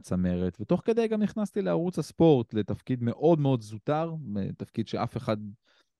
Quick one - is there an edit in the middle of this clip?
no; 0 cuts

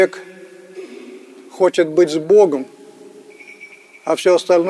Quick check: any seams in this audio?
no; 0 cuts

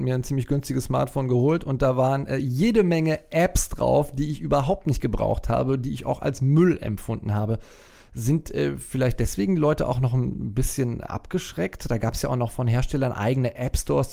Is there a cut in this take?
no; 0 cuts

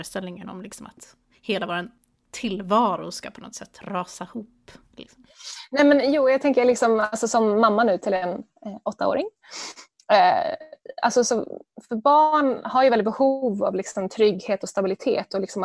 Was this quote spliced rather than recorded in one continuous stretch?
no; 0 cuts

